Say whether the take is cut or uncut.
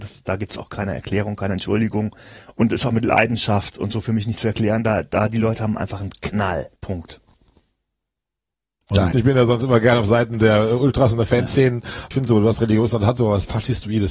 cut